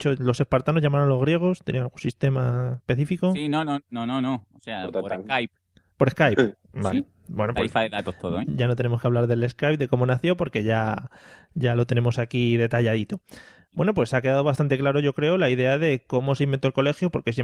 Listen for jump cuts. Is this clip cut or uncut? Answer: uncut